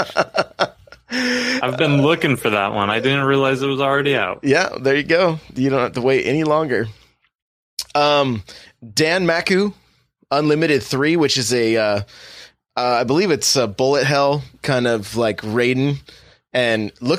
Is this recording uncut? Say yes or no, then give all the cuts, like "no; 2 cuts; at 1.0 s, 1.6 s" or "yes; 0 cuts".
yes; 0 cuts